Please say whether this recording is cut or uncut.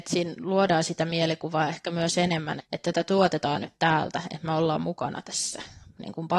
cut